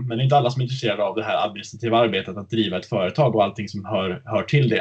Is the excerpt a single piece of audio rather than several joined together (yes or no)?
yes